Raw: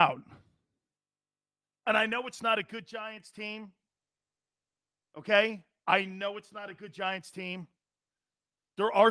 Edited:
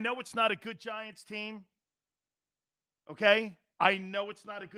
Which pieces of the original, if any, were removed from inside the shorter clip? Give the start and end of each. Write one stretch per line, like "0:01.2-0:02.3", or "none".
none